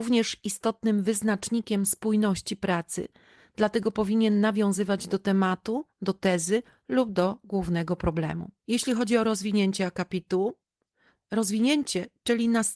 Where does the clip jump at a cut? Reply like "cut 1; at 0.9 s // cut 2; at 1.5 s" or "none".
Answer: cut 1; at 8.6 s